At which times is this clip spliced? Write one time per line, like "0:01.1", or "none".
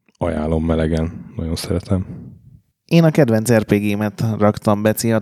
none